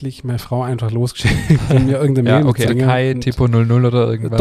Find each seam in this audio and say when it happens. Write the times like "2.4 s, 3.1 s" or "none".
2.7 s